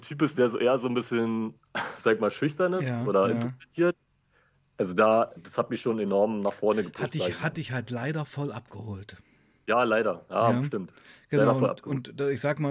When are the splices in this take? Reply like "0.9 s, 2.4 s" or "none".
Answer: 5.4 s